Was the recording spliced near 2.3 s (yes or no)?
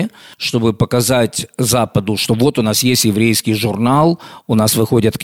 no